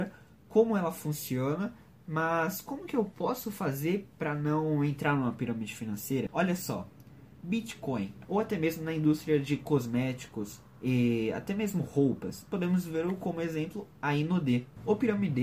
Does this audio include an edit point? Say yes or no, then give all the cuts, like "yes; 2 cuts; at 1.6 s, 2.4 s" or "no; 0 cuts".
yes; 2 cuts; at 6.3 s, 8.2 s